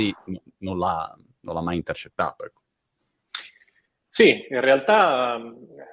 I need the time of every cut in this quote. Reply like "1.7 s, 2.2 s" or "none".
none